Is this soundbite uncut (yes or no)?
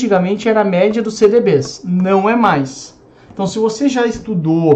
yes